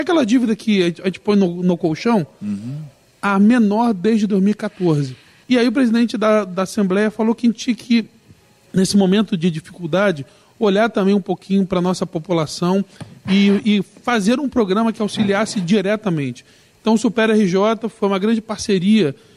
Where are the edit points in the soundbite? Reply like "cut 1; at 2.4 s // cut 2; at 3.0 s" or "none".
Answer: cut 1; at 5.4 s

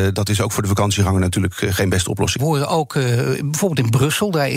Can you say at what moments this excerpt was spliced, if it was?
cut 1; at 2.4 s

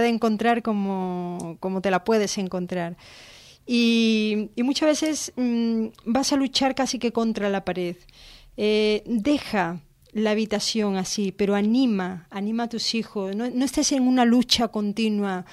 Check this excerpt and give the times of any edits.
none

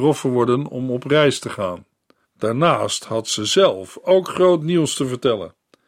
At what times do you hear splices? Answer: cut 1; at 2.2 s

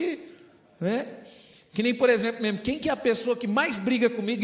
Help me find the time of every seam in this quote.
none

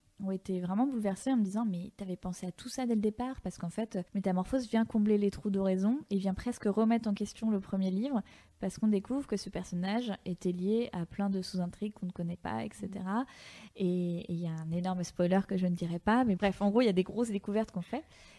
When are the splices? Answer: cut 1; at 4.1 s // cut 2; at 16.4 s

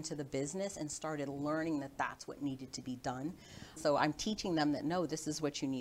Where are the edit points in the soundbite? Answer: cut 1; at 3.8 s

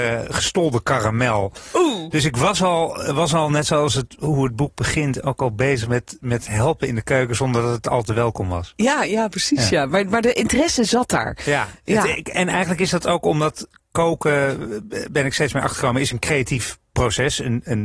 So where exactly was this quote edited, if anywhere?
none

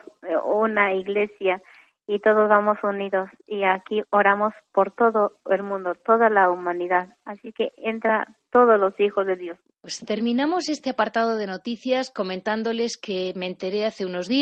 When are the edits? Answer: cut 1; at 9.7 s

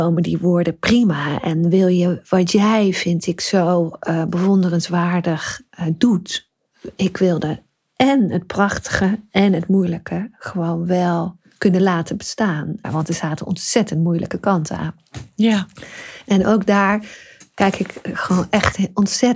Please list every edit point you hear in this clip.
cut 1; at 12.8 s

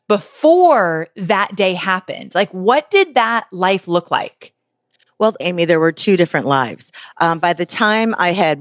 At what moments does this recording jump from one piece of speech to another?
cut 1; at 5.4 s

